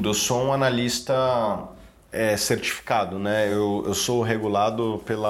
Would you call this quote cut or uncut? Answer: uncut